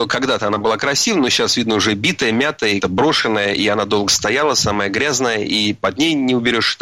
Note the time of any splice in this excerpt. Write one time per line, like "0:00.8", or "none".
0:02.8